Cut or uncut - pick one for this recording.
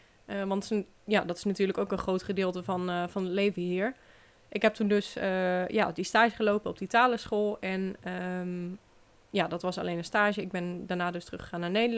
uncut